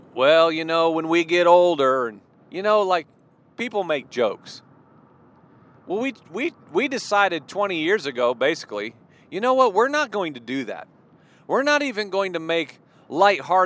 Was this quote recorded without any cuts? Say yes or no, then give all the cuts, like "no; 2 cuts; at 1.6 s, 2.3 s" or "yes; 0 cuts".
yes; 0 cuts